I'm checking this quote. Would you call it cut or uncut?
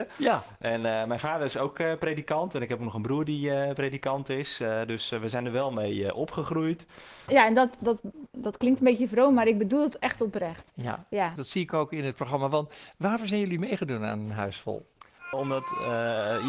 cut